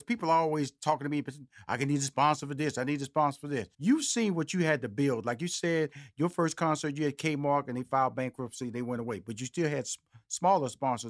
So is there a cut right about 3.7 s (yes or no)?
yes